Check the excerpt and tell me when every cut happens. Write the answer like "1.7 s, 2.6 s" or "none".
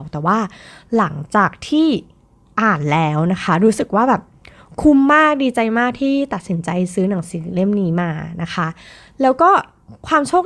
none